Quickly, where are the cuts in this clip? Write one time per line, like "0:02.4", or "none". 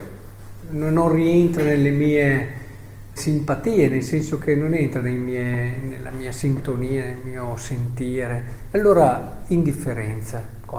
0:03.2